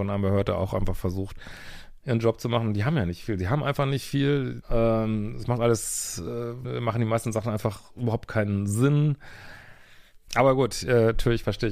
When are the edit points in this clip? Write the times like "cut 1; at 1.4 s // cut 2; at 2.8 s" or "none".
cut 1; at 4.6 s // cut 2; at 6.6 s // cut 3; at 10.3 s